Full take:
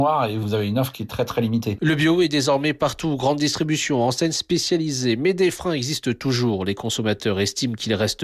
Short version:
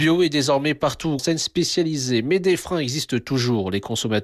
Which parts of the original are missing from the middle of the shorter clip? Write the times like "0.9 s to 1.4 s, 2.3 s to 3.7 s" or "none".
3.2 s to 4.1 s